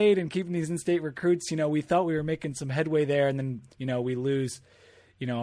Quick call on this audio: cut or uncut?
uncut